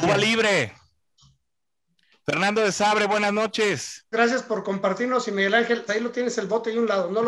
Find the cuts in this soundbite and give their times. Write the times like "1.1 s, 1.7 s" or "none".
4.1 s, 5.9 s